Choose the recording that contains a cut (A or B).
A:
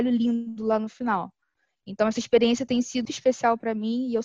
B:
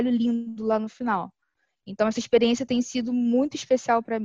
A